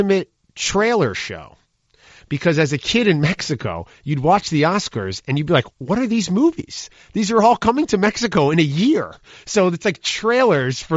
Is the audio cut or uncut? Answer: cut